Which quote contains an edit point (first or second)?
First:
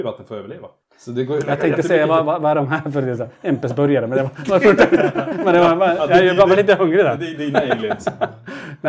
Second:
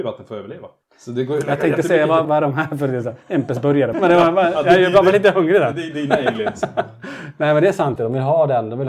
second